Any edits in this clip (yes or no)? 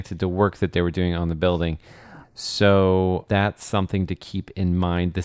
yes